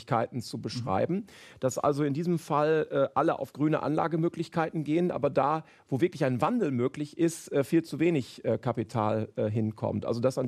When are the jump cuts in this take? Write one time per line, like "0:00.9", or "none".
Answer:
none